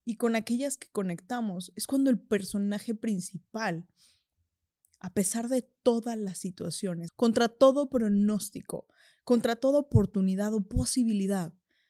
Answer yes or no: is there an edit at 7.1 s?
yes